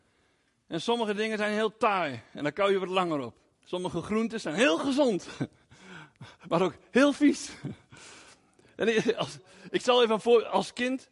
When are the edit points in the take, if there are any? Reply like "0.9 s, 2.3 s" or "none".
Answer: 3.5 s